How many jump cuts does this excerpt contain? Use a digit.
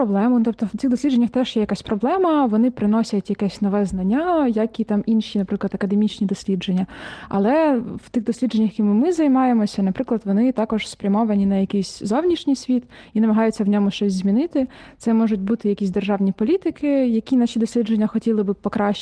0